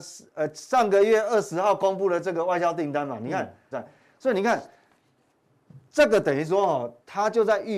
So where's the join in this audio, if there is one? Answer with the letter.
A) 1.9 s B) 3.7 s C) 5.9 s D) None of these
B